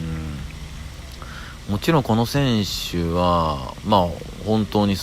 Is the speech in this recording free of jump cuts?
yes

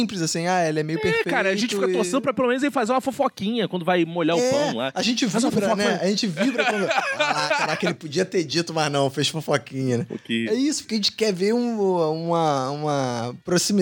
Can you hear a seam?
no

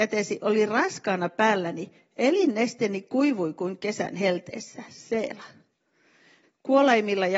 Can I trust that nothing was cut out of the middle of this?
no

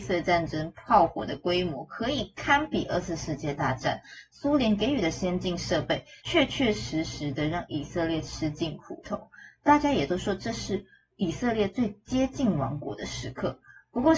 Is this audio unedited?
yes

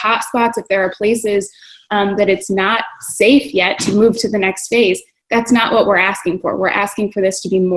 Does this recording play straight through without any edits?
yes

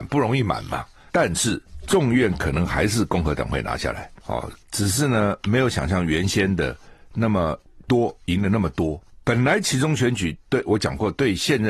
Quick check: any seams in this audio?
yes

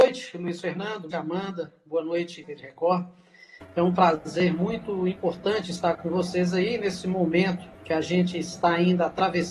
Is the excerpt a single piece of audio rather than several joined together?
no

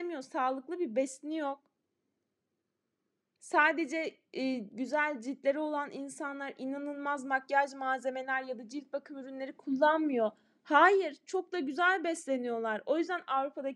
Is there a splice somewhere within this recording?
yes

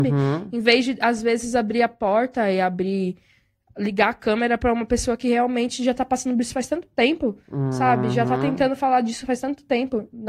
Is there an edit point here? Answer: no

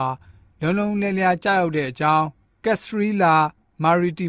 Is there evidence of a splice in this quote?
no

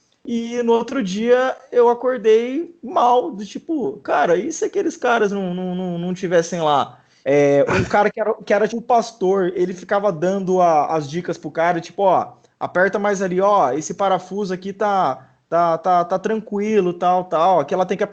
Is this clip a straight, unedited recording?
no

